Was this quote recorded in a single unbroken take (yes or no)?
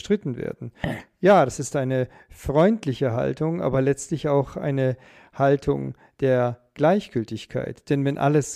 yes